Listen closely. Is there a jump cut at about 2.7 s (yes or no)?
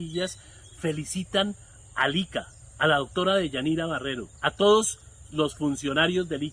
no